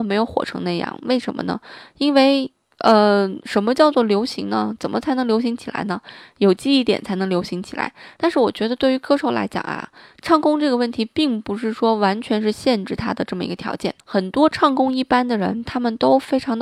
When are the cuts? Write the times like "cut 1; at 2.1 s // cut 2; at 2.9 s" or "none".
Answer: cut 1; at 8.2 s // cut 2; at 14.0 s